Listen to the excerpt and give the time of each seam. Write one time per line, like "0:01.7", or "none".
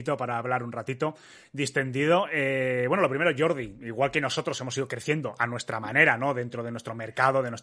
none